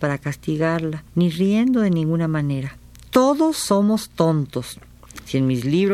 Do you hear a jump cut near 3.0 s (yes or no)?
no